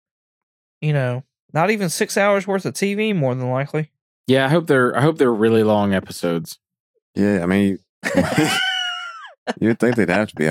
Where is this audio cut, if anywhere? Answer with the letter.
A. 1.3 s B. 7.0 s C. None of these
C